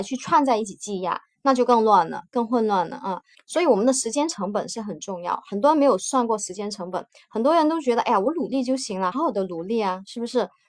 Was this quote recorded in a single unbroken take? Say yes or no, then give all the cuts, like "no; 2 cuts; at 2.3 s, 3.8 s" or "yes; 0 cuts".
no; 2 cuts; at 3.3 s, 9.1 s